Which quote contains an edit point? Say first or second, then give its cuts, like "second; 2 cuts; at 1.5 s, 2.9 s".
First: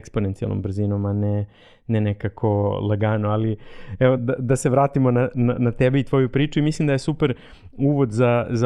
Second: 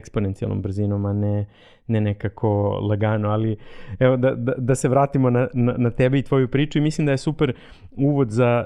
first; 1 cut; at 4.2 s